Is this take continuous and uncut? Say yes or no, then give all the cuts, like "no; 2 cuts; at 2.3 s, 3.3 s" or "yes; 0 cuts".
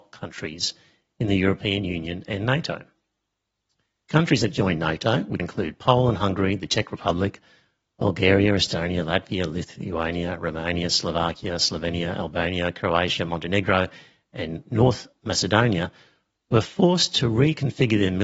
no; 1 cut; at 5.4 s